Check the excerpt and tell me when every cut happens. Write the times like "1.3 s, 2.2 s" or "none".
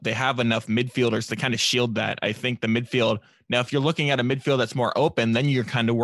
none